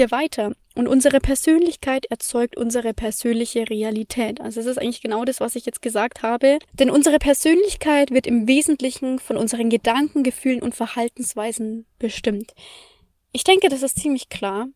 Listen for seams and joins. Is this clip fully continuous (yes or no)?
no